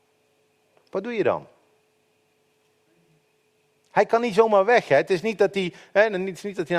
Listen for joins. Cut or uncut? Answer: uncut